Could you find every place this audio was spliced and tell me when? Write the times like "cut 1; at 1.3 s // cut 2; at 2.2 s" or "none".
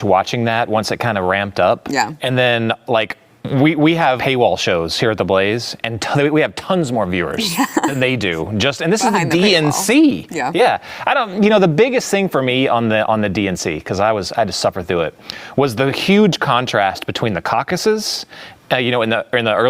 cut 1; at 4.2 s